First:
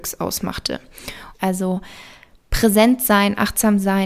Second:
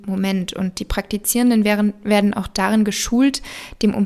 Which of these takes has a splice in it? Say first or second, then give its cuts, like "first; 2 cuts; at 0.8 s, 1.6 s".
first; 1 cut; at 1.3 s